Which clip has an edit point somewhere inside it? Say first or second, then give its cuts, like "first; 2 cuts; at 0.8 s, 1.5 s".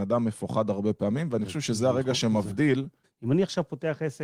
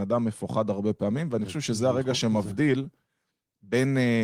first; 1 cut; at 3.0 s